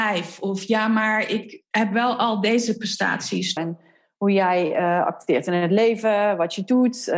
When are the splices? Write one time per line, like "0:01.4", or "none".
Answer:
0:03.6